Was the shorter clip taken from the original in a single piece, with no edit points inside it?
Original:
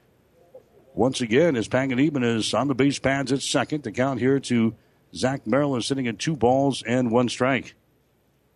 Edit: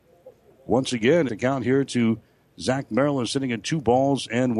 no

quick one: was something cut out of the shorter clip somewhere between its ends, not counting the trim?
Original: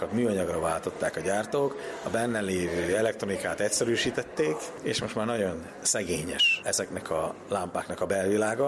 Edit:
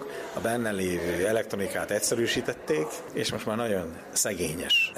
no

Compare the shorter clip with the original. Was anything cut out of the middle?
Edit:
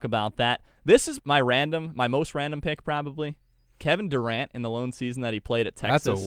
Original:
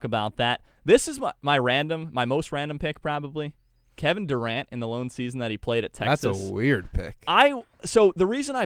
yes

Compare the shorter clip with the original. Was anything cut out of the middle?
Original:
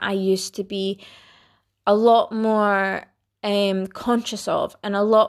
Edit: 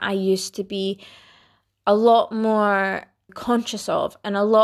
yes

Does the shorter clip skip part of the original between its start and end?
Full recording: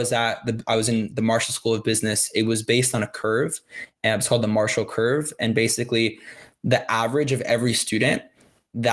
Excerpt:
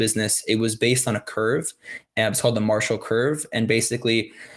no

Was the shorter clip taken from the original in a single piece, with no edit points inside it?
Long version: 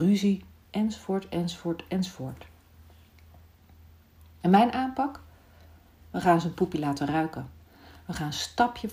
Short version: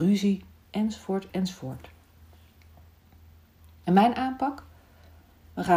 no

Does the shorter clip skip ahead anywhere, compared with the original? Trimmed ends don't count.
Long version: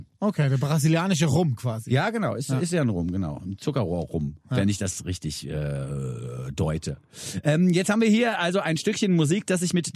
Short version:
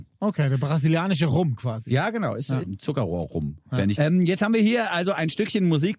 yes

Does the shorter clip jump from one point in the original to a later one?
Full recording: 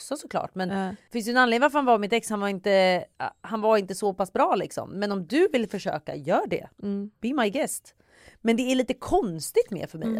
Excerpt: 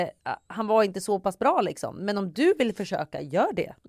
no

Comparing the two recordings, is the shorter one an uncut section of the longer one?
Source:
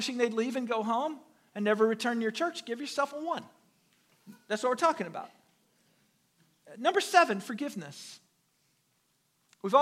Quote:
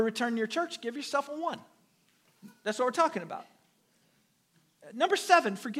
yes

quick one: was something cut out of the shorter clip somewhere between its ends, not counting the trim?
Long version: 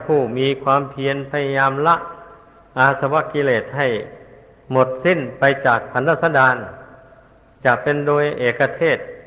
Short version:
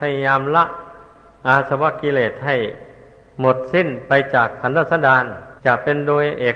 yes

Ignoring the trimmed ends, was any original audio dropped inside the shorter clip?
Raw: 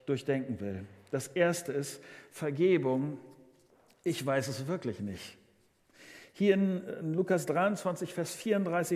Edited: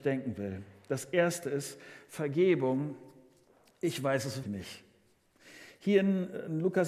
yes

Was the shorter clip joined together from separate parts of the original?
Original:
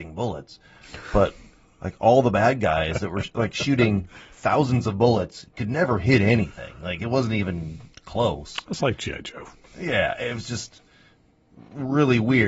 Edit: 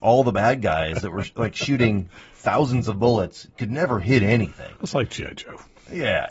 yes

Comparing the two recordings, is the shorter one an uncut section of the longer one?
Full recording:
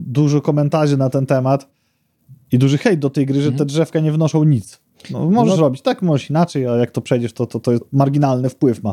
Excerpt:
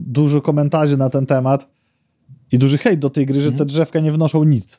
yes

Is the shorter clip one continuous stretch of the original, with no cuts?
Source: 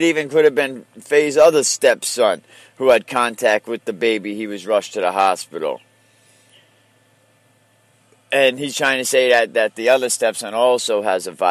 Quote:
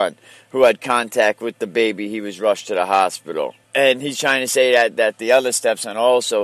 no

